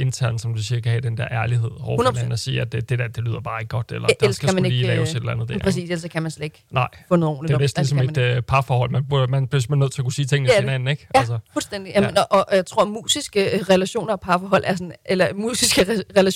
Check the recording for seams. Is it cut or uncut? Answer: uncut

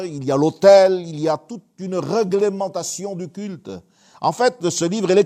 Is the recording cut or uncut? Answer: uncut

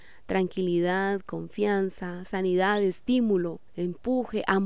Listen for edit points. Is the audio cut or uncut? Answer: uncut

